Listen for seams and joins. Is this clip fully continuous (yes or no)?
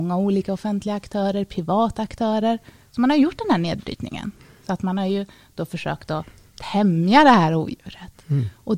yes